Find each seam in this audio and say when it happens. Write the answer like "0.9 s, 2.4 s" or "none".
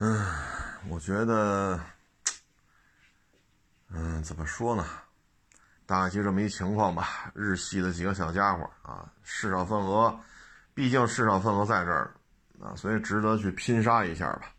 5.8 s